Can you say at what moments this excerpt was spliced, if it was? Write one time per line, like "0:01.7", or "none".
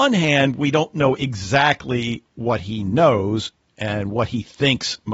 none